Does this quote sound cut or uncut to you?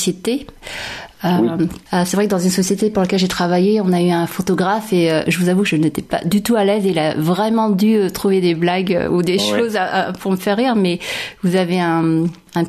cut